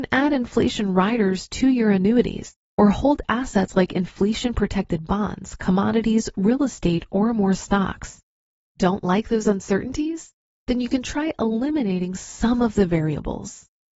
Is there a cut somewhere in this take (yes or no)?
yes